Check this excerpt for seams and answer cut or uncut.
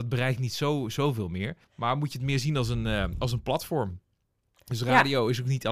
cut